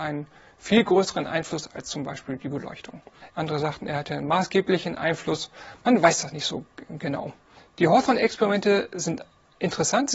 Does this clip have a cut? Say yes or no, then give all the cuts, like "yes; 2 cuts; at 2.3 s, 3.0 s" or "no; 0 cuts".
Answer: yes; 1 cut; at 3.3 s